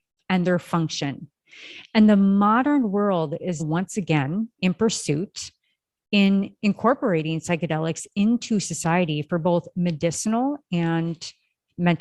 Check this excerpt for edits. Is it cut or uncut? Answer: cut